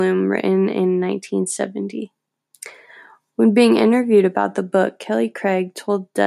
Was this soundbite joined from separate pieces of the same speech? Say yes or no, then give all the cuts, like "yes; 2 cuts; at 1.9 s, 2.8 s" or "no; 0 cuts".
no; 0 cuts